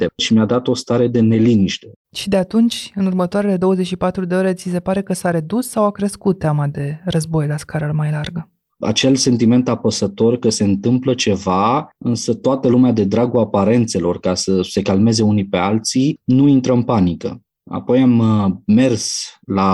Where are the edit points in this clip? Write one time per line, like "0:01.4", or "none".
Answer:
0:08.7

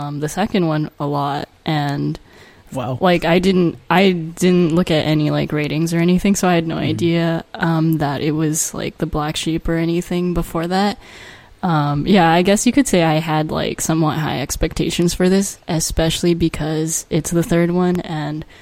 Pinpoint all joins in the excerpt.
none

